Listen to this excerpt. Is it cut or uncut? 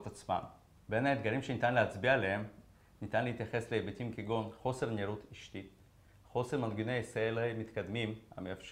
uncut